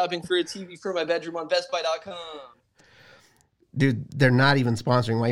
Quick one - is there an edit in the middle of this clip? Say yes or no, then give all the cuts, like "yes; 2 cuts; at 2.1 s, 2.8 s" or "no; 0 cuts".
no; 0 cuts